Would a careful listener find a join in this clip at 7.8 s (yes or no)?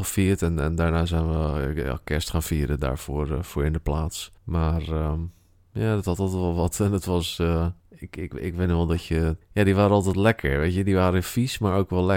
yes